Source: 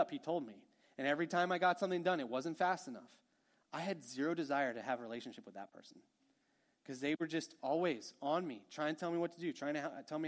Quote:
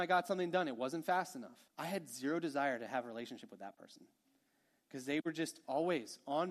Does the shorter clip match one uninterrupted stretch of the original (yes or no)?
no